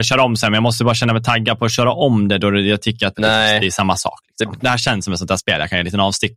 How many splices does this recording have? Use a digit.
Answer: 2